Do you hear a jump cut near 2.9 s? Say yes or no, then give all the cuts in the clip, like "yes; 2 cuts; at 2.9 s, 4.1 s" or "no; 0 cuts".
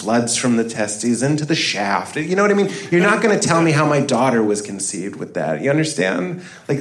no; 0 cuts